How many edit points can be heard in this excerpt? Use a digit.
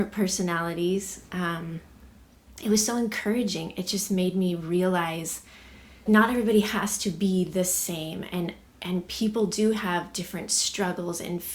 1